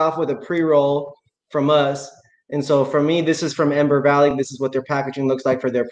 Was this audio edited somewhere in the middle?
no; 0 cuts

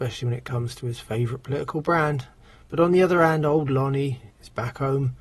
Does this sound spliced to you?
yes; 1 cut; at 4.3 s

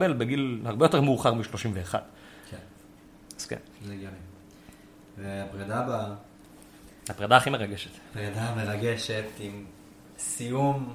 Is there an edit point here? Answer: no; 0 cuts

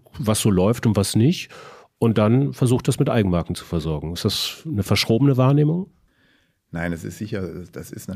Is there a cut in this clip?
no; 0 cuts

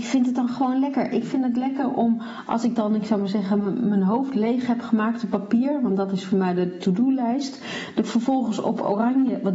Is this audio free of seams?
yes; 0 cuts

